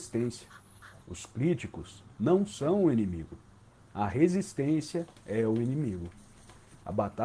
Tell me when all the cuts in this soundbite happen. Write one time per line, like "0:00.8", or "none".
0:01.0

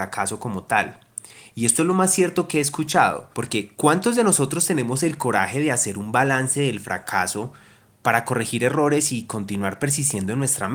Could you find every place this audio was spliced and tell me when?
0:03.3

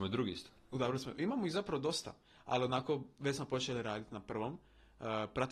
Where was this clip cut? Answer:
none

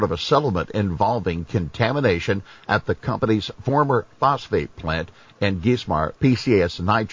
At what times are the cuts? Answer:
0:06.2

